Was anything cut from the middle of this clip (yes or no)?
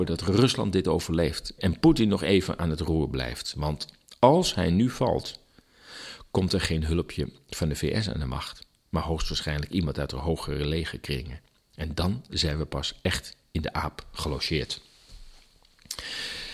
yes